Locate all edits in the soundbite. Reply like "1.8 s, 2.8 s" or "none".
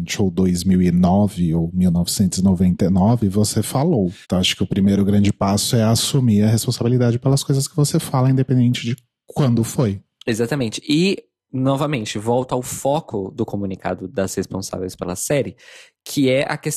4.2 s